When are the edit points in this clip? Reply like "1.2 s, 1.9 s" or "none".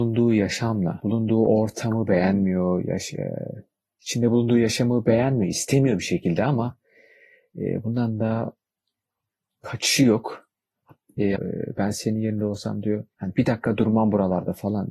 11.3 s, 13.1 s